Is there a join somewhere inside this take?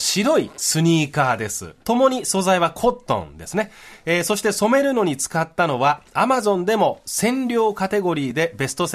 yes; 1 cut; at 1.8 s

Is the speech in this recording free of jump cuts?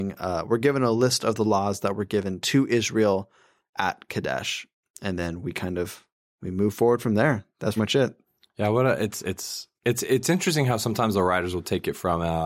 no; 2 cuts; at 7.8 s, 9.7 s

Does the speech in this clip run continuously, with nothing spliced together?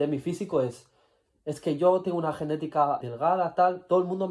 no; 1 cut; at 3.0 s

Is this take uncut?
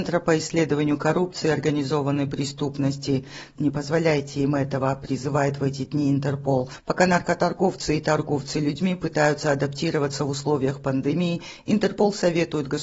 no; 1 cut; at 3.5 s

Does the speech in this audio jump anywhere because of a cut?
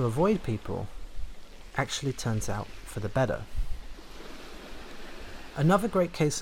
no; 0 cuts

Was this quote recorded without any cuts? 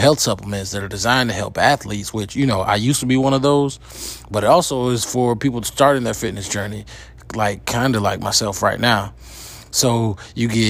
yes; 0 cuts

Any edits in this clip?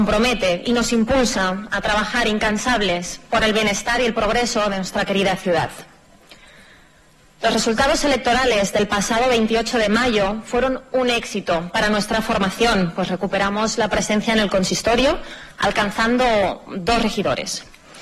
no; 0 cuts

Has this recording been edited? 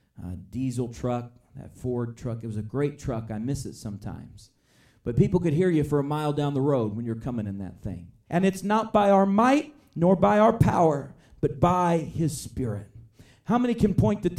yes; 1 cut; at 8.3 s

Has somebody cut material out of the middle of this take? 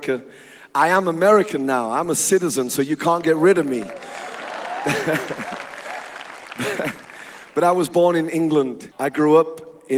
yes; 1 cut; at 8.9 s

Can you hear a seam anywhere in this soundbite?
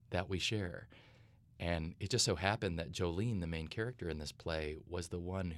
no; 0 cuts

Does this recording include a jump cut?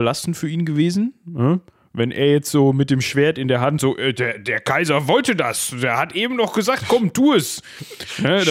no; 0 cuts

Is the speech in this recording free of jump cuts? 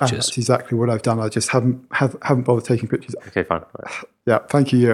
no; 1 cut; at 3.2 s

